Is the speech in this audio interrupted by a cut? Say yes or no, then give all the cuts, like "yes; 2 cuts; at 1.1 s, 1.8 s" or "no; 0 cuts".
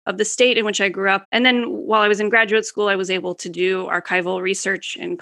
yes; 1 cut; at 1.2 s